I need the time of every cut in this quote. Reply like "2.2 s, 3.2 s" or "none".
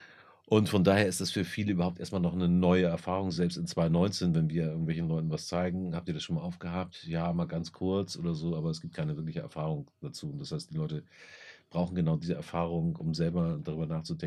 none